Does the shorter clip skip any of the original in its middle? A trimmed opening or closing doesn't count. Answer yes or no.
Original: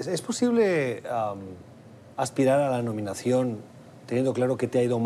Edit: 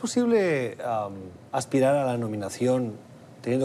yes